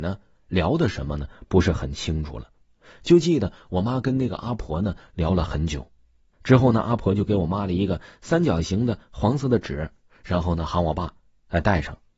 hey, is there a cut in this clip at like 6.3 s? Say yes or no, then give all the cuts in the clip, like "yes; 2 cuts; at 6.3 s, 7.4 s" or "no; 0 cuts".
yes; 1 cut; at 6.3 s